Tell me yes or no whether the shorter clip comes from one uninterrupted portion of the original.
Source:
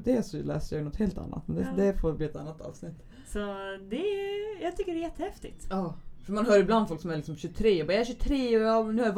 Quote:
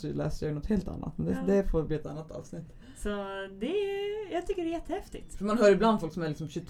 no